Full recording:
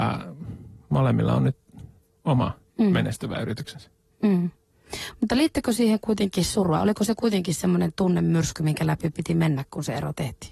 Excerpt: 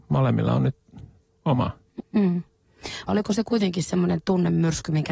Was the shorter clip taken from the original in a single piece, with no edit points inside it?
no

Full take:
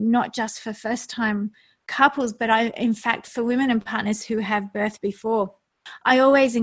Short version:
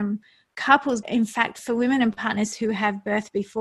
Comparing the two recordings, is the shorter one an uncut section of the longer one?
no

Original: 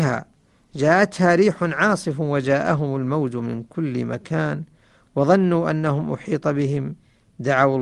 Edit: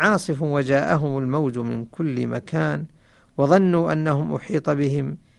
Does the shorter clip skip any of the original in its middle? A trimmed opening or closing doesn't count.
no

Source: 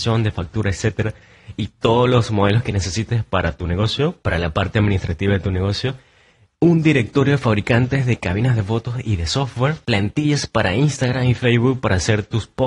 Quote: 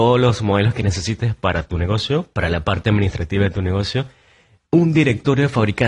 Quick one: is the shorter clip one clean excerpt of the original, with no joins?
yes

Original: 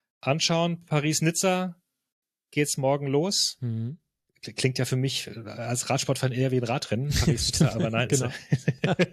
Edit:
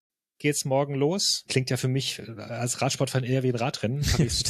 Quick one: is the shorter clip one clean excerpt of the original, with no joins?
no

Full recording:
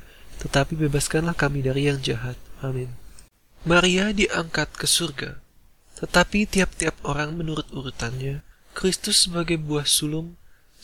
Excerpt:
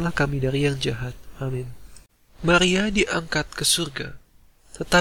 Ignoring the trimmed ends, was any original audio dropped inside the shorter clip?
no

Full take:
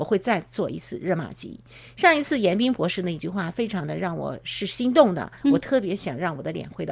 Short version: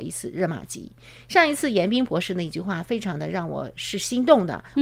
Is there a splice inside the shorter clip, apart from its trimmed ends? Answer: no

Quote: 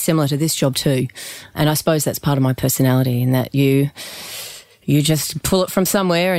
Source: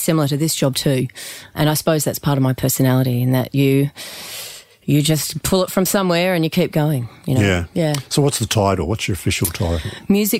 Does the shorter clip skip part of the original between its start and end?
no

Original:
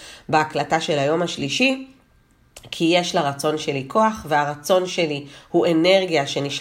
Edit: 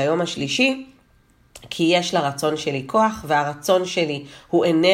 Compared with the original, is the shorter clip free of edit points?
yes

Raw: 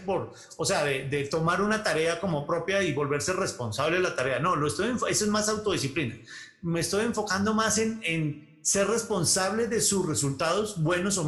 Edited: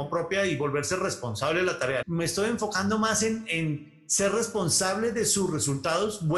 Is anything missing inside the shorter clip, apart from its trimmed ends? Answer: yes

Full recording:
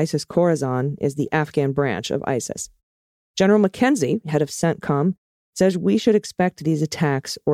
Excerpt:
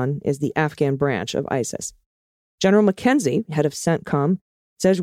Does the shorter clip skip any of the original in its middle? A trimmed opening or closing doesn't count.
no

